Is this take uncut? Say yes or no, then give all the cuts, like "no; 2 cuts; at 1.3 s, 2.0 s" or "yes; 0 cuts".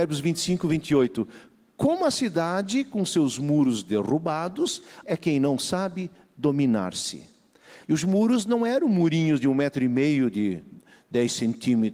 no; 2 cuts; at 5.0 s, 7.8 s